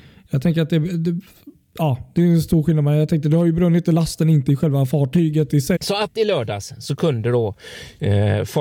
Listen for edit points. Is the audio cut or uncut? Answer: cut